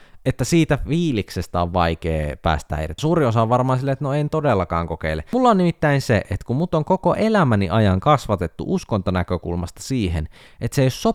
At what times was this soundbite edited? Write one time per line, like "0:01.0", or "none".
0:03.0